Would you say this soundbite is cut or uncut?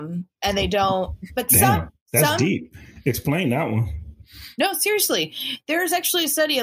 uncut